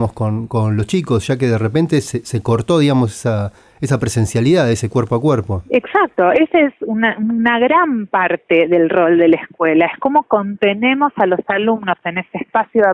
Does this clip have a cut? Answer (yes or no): no